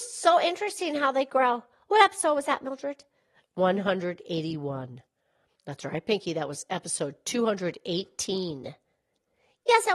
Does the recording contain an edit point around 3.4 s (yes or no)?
no